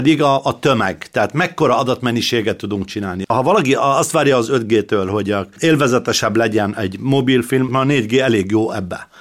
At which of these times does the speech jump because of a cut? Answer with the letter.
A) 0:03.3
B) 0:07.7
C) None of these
B